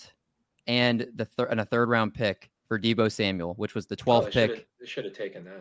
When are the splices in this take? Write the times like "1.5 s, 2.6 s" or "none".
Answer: 2.6 s